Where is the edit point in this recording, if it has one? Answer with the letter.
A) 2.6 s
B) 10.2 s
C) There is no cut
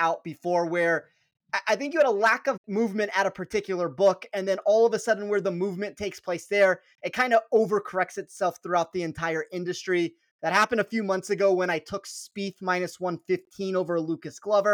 A